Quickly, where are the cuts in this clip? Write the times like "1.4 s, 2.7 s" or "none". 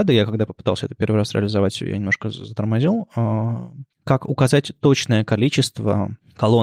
3.9 s